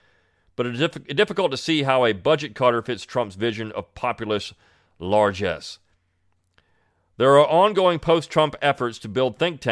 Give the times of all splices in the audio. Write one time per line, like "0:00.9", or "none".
none